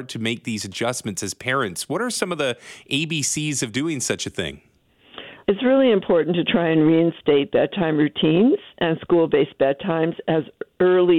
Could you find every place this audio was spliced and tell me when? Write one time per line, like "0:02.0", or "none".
0:05.4

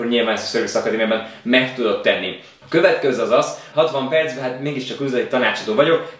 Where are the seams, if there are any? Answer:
0:02.6
0:03.7

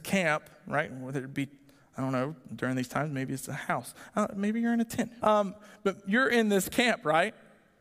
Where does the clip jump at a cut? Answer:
0:05.2

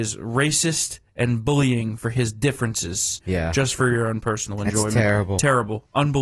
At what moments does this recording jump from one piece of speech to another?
0:03.2

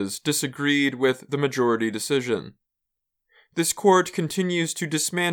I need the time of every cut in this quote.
none

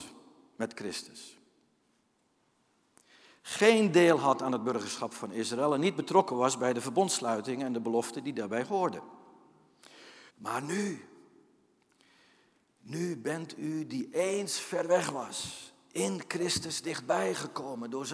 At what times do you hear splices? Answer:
0:10.3

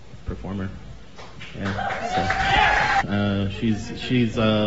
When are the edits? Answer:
0:03.0

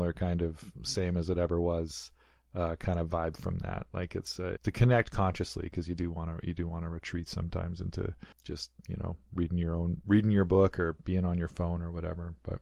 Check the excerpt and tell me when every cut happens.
0:04.6
0:08.3

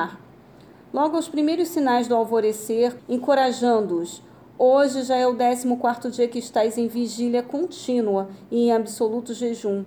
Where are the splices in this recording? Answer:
0:03.0

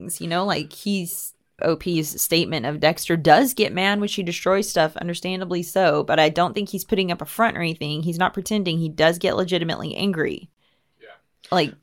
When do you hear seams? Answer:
0:01.6

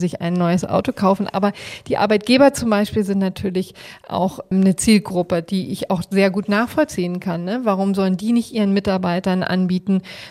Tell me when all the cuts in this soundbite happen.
none

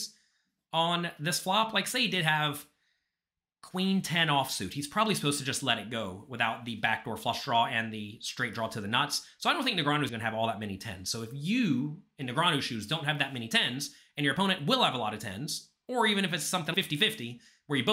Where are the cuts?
0:10.1
0:16.7

